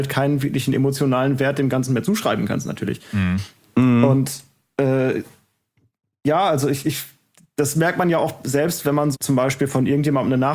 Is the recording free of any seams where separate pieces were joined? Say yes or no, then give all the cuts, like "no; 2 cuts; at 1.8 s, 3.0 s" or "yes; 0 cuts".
no; 1 cut; at 9.1 s